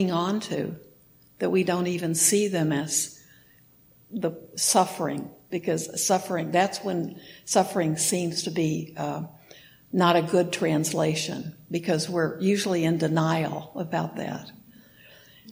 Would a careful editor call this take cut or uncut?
uncut